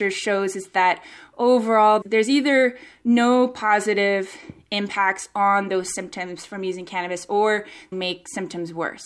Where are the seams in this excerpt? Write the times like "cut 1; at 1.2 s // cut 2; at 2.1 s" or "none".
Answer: cut 1; at 2.0 s // cut 2; at 7.9 s